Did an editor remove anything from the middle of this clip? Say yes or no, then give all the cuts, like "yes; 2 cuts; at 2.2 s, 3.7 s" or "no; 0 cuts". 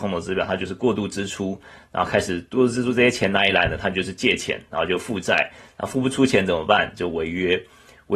no; 0 cuts